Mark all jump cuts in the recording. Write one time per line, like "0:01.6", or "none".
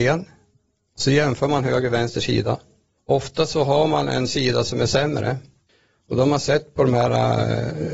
none